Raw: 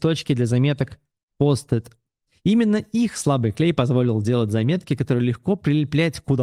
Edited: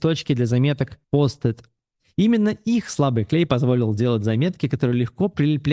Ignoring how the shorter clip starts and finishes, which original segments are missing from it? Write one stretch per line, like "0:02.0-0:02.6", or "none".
0:01.0-0:01.3